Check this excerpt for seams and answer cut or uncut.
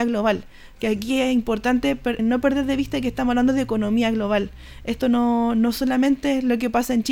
cut